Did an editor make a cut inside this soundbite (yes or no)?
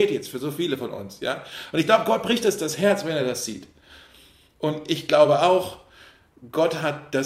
no